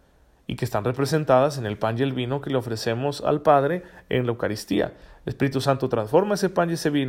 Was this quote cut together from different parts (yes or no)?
no